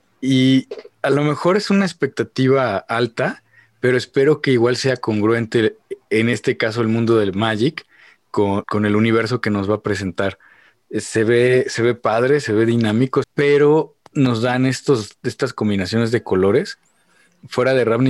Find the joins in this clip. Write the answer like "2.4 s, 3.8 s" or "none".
8.6 s, 13.2 s